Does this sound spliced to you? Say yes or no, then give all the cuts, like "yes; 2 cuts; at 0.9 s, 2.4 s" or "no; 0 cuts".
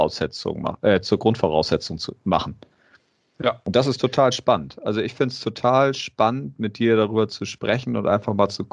no; 0 cuts